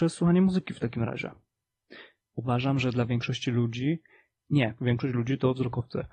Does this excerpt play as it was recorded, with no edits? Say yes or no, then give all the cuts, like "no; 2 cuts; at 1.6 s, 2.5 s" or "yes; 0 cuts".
no; 2 cuts; at 2.2 s, 4.8 s